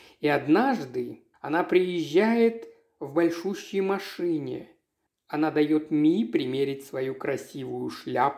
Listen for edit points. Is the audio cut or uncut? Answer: cut